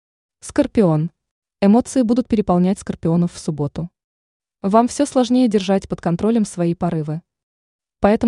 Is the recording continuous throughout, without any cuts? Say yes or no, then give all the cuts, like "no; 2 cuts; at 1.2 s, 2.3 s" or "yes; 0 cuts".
yes; 0 cuts